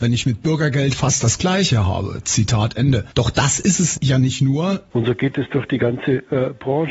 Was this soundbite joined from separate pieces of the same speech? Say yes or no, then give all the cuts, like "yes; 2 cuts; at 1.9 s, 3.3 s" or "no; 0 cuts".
yes; 1 cut; at 4.9 s